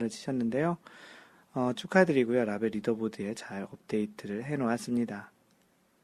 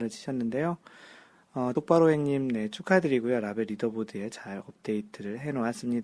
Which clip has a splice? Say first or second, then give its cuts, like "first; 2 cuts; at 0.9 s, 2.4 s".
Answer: first; 1 cut; at 1.8 s